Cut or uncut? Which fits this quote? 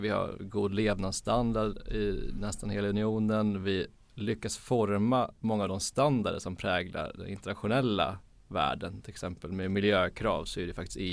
uncut